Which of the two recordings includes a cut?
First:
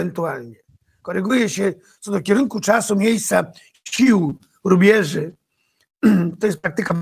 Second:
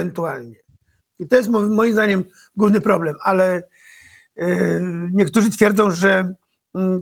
second; 1 cut; at 1.0 s

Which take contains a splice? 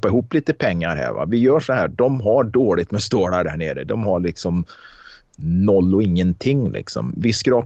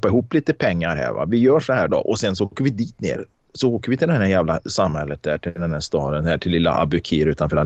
second; 1 cut; at 1.9 s

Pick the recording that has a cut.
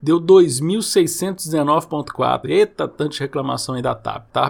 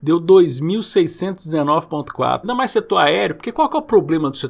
second; 1 cut; at 2.4 s

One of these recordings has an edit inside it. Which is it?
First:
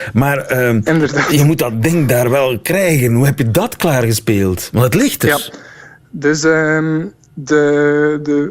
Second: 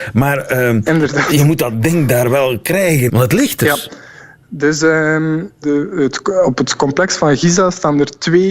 second; 2 cuts; at 3.1 s, 5.6 s

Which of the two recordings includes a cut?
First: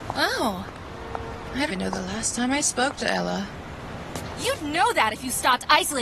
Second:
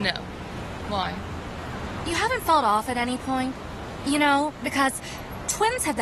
first; 1 cut; at 1.7 s

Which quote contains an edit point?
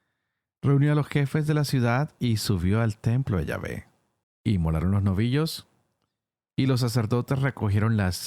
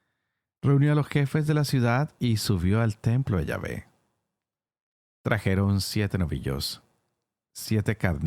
first; 1 cut; at 4.2 s

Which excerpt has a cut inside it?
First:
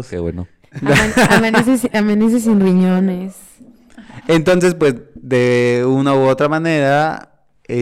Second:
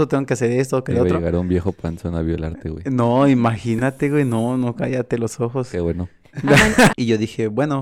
second; 1 cut; at 6.9 s

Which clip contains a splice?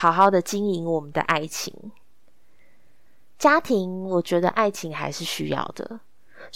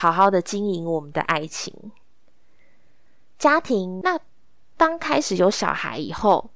second; 1 cut; at 4.0 s

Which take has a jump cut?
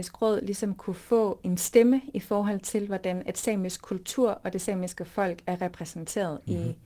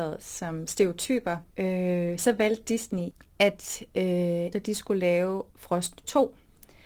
second; 2 cuts; at 1.5 s, 4.5 s

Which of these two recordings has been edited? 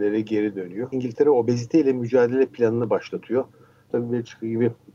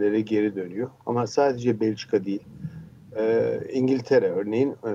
first; 2 cuts; at 0.9 s, 3.9 s

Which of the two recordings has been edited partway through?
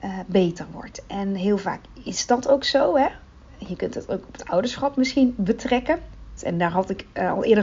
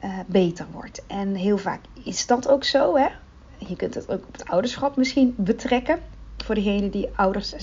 first; 1 cut; at 6.4 s

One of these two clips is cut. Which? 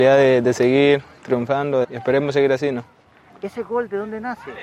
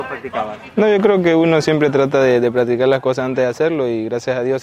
first; 1 cut; at 1.8 s

